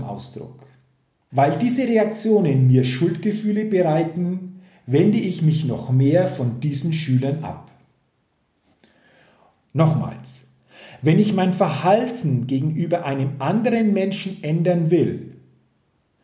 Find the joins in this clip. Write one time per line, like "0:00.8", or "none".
0:01.3
0:09.6